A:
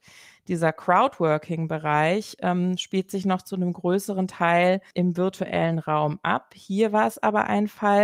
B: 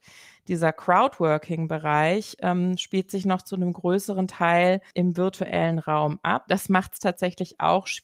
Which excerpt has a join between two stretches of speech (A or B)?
B